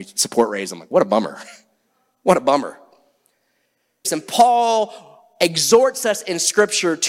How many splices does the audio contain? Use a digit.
1